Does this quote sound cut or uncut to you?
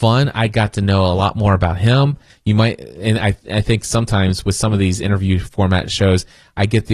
cut